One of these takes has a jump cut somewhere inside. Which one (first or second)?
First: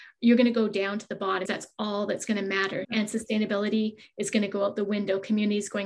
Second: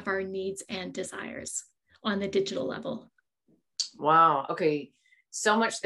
first